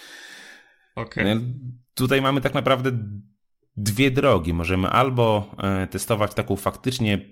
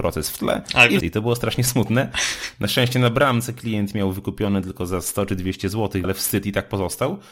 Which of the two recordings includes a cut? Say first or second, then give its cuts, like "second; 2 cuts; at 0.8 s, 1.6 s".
second; 2 cuts; at 1.0 s, 6.0 s